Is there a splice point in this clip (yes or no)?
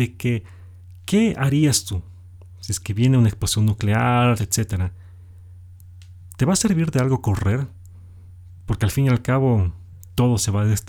yes